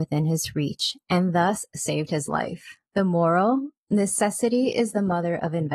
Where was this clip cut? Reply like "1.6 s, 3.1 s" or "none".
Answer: 2.9 s

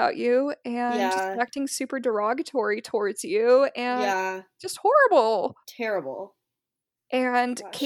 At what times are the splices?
5.6 s

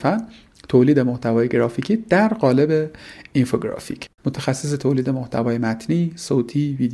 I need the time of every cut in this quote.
4.2 s

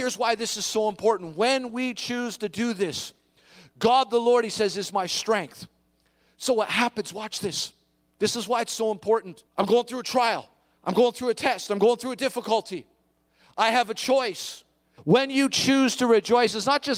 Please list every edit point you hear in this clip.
9.5 s, 15.0 s

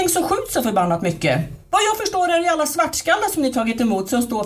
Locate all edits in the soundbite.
none

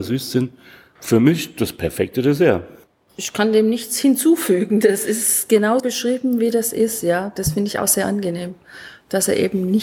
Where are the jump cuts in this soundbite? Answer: 5.8 s

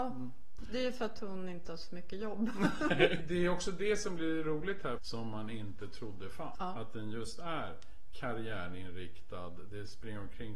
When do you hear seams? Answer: 3.2 s, 5.0 s, 6.5 s

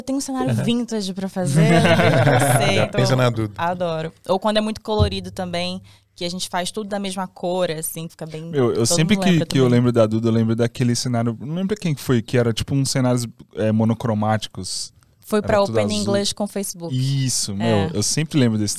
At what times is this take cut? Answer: 8.1 s

